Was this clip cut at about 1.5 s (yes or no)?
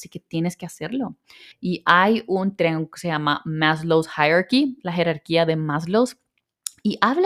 yes